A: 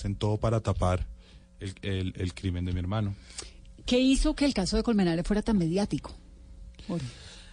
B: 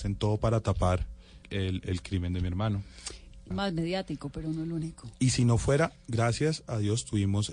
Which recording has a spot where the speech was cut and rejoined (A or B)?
B